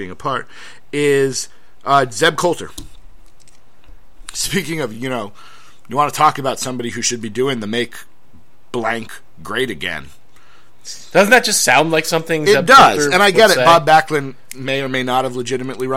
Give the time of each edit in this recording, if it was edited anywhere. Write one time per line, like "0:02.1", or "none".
none